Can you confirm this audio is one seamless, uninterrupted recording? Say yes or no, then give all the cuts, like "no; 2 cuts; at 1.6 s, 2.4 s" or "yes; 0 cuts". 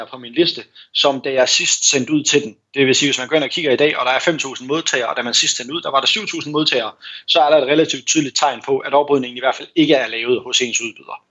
yes; 0 cuts